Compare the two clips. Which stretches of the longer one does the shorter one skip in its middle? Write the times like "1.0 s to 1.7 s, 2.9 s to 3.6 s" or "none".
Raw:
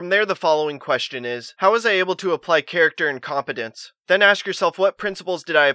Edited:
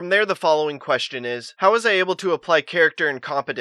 none